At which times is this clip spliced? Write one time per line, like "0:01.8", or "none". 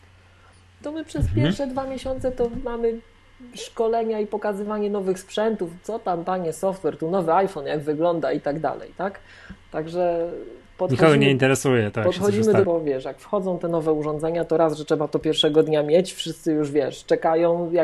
0:12.6